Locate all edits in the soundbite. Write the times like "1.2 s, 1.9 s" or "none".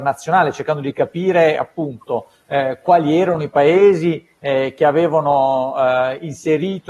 none